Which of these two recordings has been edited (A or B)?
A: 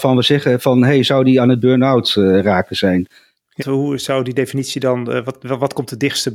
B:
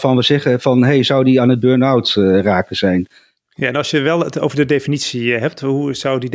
A